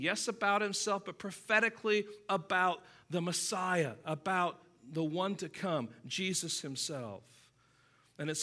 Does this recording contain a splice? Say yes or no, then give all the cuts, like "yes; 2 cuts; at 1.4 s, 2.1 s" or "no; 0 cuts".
no; 0 cuts